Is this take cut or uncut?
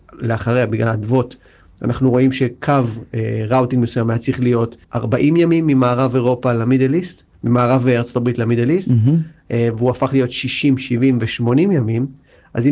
cut